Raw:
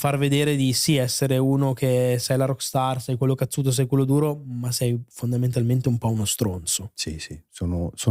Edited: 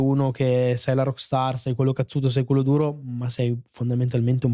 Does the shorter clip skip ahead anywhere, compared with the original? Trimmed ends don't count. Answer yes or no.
no